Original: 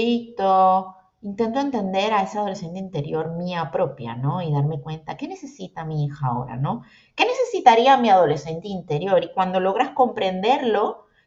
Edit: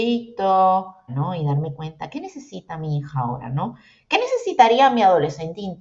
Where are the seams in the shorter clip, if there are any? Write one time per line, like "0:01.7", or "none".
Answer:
0:01.1